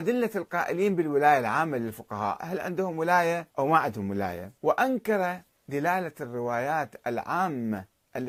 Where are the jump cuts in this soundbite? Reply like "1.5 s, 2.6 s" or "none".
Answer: 2.4 s, 3.5 s, 4.6 s